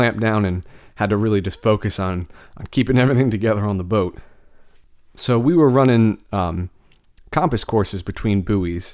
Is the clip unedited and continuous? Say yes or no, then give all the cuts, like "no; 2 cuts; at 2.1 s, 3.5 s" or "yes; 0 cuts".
yes; 0 cuts